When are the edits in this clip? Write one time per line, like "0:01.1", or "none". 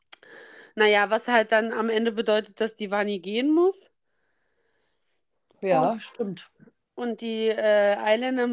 none